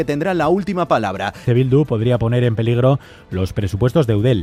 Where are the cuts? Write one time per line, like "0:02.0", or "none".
0:01.5